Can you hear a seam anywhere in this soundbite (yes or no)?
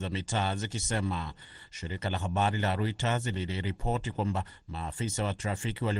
no